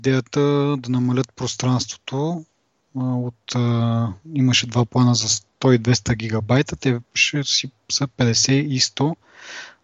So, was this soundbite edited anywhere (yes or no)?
no